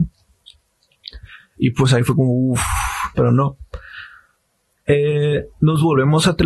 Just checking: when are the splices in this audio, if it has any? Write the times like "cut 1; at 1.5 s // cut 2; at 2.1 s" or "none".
cut 1; at 1.4 s // cut 2; at 3.1 s